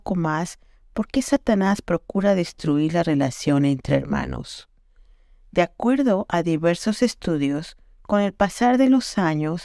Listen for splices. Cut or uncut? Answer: uncut